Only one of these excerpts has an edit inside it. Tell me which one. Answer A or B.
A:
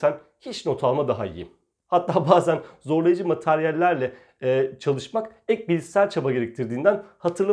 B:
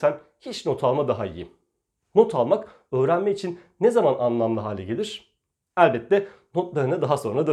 A